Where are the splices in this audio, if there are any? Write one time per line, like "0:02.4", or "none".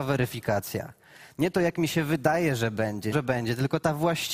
0:03.1